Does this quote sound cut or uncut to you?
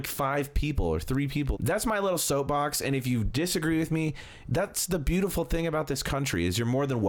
cut